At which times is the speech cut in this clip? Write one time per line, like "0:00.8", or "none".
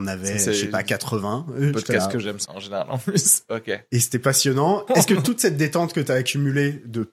0:02.5
0:04.9